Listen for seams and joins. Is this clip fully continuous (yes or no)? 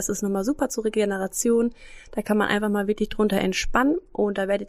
yes